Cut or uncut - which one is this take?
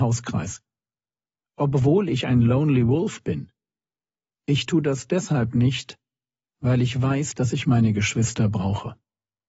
uncut